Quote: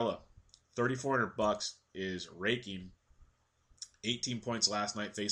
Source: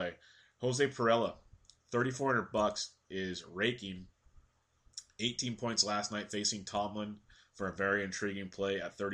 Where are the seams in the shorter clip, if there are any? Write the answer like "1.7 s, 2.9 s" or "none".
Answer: none

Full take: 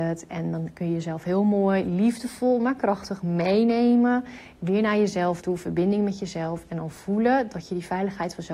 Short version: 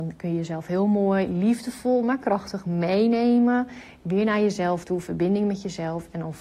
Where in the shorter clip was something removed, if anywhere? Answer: none

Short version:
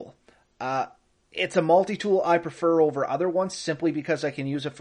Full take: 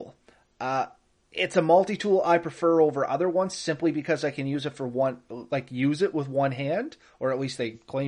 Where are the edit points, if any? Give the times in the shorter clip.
none

